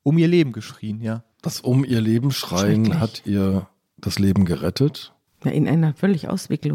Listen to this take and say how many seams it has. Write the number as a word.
one